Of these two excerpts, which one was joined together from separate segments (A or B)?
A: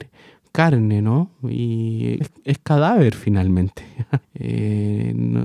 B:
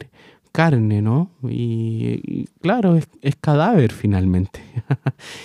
A